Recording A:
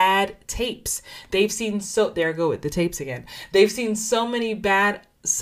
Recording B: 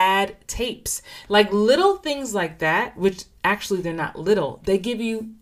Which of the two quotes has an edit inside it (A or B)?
B